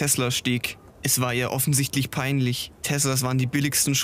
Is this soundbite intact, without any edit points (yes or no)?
yes